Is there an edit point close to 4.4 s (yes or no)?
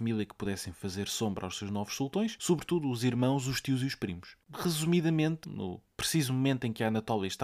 yes